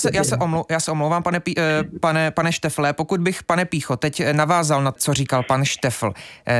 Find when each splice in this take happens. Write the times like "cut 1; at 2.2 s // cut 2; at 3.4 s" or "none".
cut 1; at 5.0 s